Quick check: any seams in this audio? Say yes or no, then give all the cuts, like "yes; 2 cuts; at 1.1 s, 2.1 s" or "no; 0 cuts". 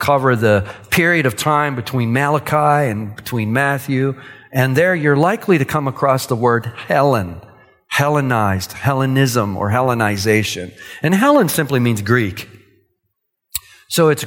no; 0 cuts